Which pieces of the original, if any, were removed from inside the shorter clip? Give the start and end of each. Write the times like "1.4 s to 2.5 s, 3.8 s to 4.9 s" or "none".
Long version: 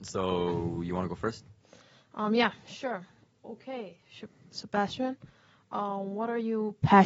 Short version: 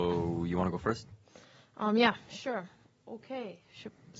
none

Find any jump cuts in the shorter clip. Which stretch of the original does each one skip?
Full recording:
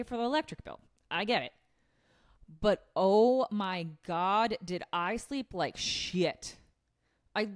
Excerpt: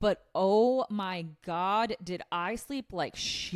none

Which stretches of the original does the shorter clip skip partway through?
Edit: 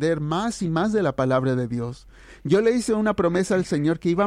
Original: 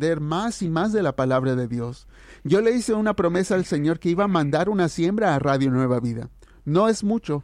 none

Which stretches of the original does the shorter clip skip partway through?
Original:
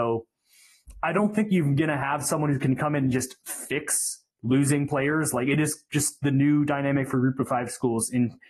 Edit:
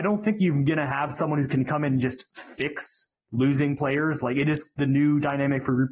5.9 s to 6.2 s

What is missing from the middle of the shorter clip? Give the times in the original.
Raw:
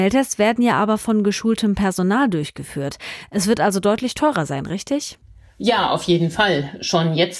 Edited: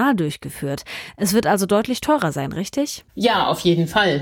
5.2 s to 5.5 s

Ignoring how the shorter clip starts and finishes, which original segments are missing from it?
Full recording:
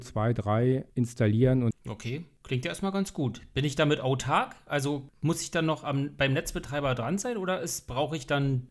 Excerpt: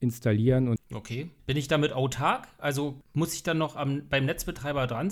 2.3 s to 3.5 s

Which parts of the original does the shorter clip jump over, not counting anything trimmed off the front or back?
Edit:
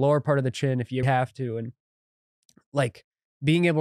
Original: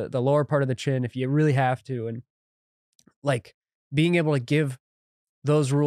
1.3 s to 1.5 s

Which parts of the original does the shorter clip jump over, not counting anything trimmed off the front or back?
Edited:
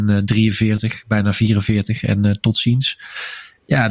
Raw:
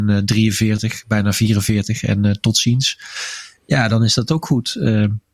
none

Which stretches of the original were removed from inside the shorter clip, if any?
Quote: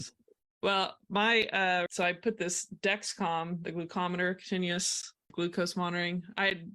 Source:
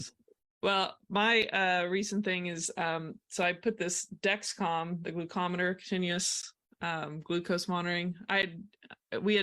1.9 s to 3.3 s, 6.7 s to 7.2 s

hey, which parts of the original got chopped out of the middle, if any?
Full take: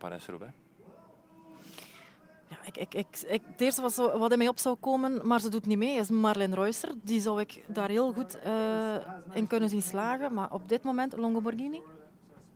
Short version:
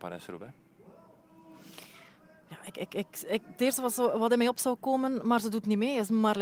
none

